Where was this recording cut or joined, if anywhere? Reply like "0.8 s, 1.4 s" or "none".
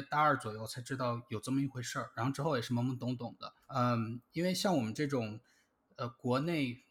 3.6 s